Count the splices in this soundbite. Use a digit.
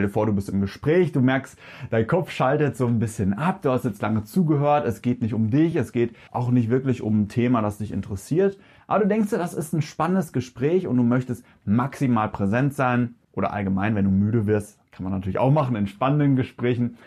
0